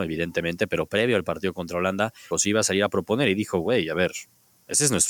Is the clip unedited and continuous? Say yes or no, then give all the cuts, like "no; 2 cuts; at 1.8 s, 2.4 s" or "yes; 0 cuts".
no; 1 cut; at 2.3 s